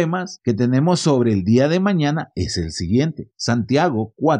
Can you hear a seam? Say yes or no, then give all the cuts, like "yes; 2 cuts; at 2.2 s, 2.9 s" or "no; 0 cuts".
no; 0 cuts